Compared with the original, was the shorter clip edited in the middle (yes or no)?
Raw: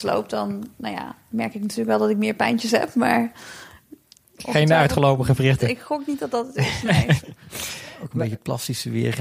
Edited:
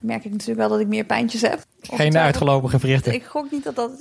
yes